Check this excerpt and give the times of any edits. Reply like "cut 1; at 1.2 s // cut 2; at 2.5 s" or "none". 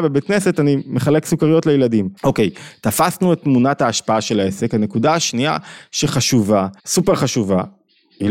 cut 1; at 2.2 s // cut 2; at 6.8 s